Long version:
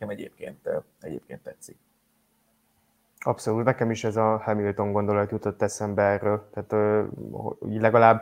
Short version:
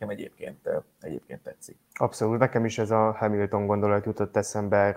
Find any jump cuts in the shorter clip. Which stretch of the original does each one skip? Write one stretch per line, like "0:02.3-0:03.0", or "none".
0:01.8-0:03.1